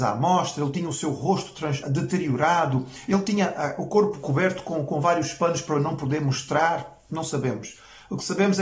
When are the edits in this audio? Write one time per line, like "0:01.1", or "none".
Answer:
0:01.8